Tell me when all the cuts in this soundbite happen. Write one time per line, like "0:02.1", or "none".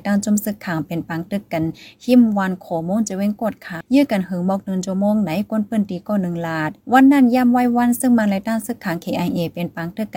0:03.8
0:06.8